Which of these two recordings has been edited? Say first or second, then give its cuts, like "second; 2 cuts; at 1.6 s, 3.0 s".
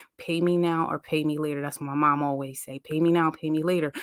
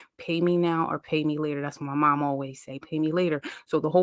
second; 1 cut; at 2.8 s